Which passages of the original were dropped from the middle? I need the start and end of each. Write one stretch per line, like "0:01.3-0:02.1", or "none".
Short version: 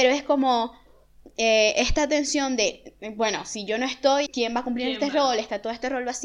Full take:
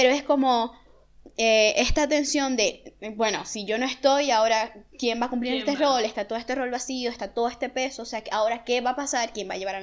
0:04.3-0:04.9